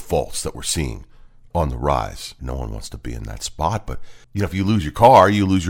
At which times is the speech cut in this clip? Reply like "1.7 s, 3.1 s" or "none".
2.4 s, 4.2 s

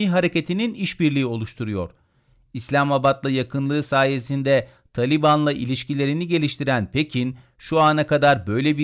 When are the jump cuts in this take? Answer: none

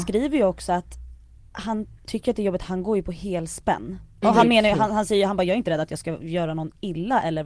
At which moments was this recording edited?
4.2 s

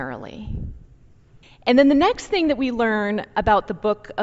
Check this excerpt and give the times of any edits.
1.4 s

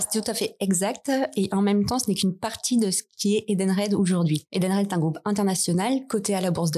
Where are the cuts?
none

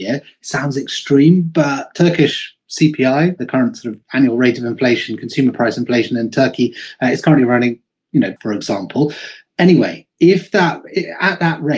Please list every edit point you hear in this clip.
8.4 s

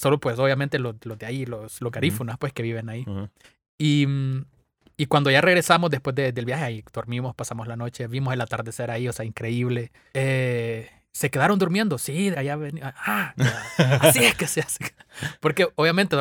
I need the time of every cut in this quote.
10.1 s, 12.3 s, 13.4 s

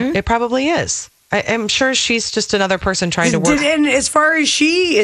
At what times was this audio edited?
3.6 s

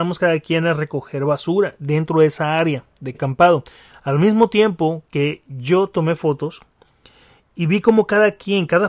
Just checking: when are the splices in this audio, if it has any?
3.1 s

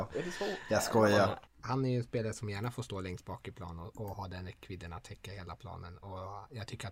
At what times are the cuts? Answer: 1.5 s

